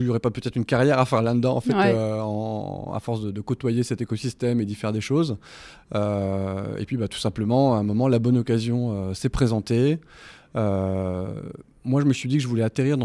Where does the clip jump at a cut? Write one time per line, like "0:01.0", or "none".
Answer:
none

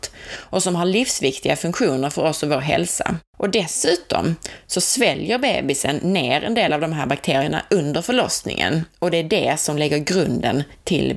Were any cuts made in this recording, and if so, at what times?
0:03.3

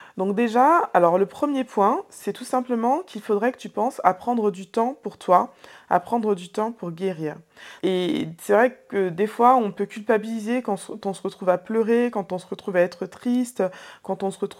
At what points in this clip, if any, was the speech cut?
0:07.8

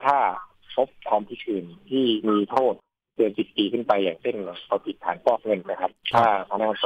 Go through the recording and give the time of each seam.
0:05.6

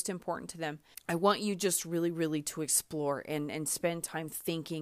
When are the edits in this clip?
0:00.9

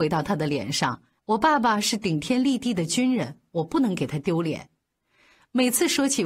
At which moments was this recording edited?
0:01.2

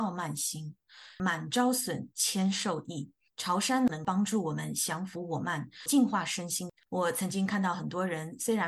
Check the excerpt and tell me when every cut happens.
0:06.9

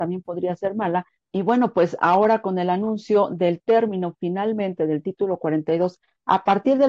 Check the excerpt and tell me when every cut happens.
0:01.2

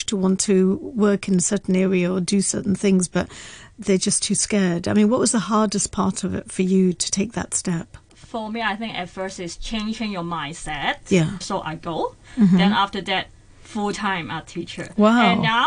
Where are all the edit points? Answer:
0:11.4

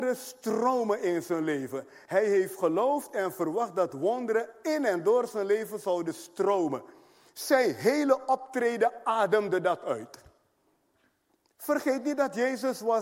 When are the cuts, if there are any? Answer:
none

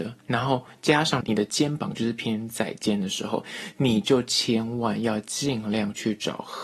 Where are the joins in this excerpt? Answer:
0:01.2

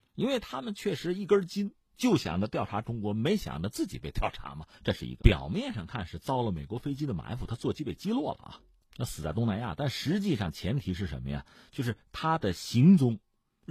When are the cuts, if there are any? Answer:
0:05.2

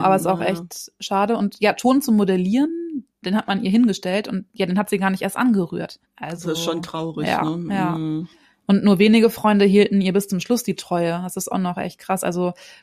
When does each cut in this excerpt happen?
0:06.0

